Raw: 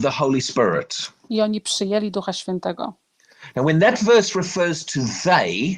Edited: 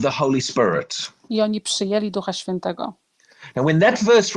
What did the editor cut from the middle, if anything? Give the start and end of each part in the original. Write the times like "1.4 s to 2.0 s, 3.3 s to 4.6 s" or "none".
none